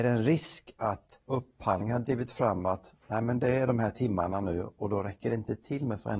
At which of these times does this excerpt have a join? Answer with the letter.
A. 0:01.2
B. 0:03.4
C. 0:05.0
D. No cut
A